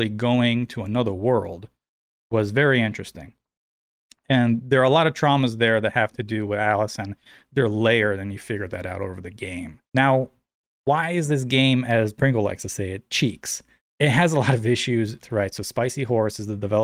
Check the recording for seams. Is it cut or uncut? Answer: cut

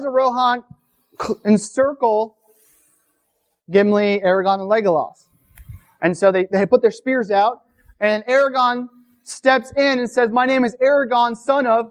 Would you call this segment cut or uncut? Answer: uncut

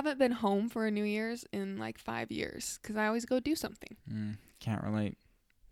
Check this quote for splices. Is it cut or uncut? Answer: uncut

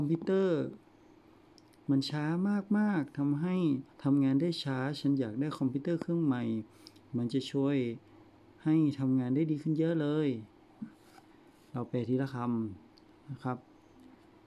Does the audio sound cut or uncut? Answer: cut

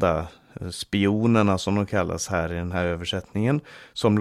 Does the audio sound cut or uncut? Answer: uncut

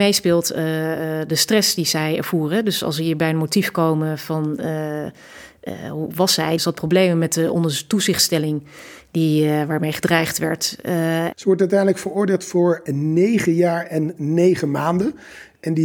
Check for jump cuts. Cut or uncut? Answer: cut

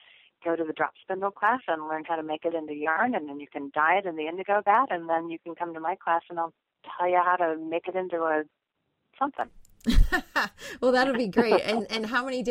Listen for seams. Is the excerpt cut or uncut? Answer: uncut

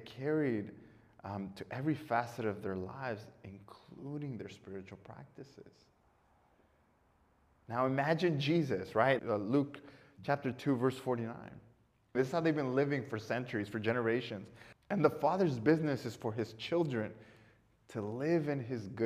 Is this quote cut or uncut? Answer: cut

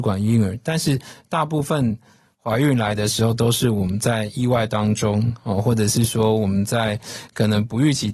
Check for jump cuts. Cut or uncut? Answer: uncut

